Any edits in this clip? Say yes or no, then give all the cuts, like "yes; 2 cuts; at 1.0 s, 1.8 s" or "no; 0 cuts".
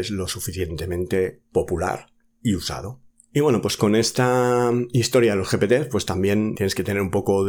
yes; 1 cut; at 6.5 s